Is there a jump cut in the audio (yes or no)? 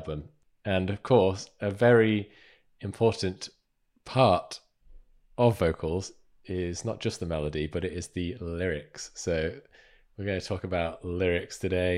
no